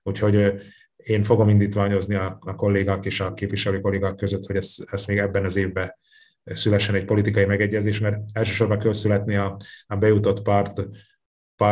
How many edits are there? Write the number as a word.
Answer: zero